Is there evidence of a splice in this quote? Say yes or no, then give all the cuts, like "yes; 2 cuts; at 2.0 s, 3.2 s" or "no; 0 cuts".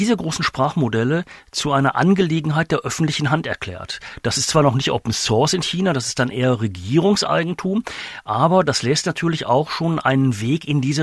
no; 0 cuts